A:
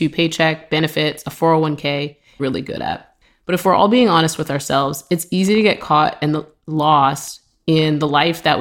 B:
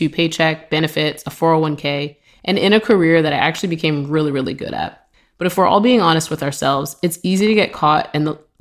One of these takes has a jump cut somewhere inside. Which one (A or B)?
A